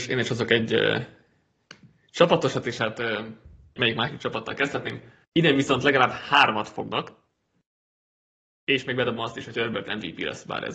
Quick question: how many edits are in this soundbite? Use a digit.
2